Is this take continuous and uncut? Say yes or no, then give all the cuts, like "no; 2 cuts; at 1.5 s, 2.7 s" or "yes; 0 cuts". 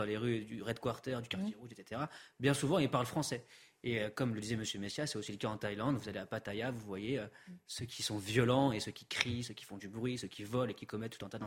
yes; 0 cuts